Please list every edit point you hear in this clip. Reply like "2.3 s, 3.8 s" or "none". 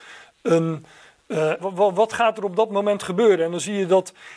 1.6 s

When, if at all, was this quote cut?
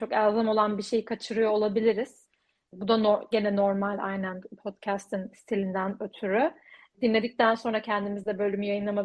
2.7 s, 6.9 s

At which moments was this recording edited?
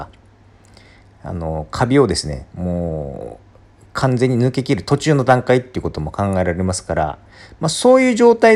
none

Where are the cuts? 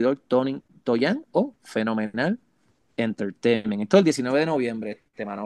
none

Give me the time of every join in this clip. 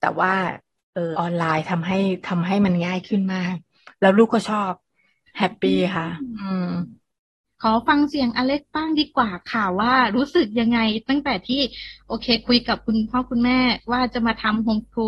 1.1 s

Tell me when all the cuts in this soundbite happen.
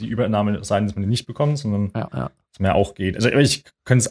none

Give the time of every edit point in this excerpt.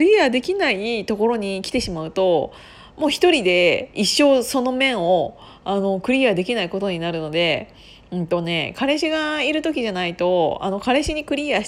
none

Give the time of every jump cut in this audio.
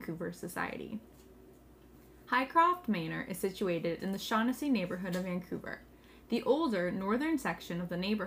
none

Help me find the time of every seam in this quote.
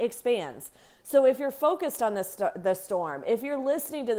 none

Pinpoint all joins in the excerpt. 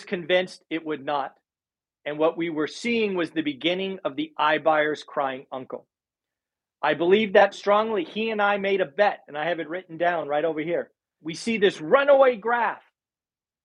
7.5 s, 11.2 s

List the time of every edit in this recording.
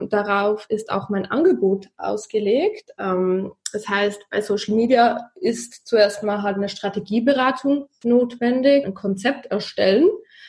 8.8 s

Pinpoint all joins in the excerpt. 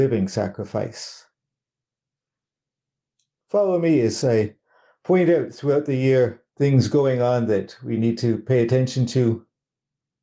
6.5 s

